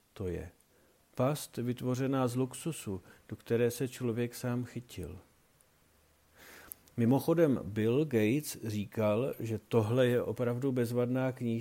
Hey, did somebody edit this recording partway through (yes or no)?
no